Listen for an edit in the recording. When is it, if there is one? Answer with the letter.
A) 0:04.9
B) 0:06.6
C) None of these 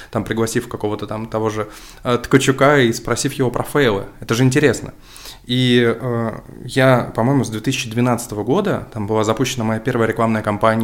C